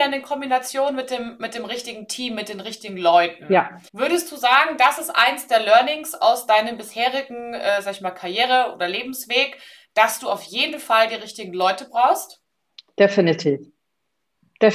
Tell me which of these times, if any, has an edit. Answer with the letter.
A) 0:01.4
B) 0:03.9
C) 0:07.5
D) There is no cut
B